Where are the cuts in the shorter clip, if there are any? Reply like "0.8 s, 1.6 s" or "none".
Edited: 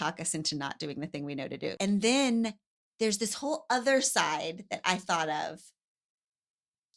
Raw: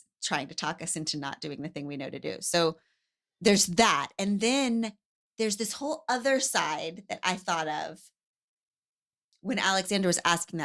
1.8 s